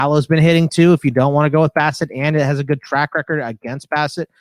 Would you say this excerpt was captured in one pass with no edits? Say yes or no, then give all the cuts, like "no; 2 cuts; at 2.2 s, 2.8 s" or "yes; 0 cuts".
yes; 0 cuts